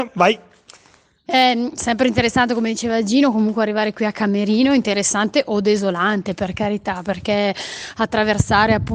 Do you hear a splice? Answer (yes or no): yes